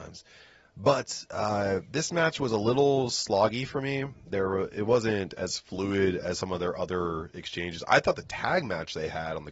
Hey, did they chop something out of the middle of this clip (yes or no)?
no